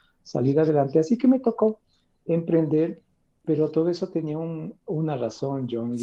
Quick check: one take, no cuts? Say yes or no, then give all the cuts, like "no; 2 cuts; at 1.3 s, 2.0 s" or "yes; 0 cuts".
no; 1 cut; at 3.4 s